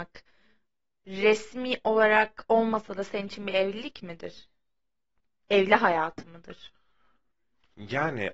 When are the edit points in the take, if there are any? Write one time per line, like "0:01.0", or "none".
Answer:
none